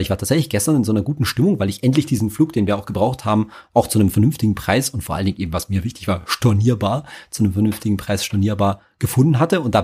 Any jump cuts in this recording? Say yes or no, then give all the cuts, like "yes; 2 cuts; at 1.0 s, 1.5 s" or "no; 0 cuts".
no; 0 cuts